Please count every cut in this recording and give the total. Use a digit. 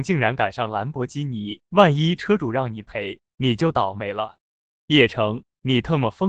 1